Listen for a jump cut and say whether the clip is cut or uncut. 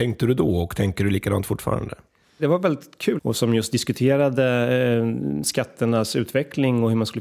cut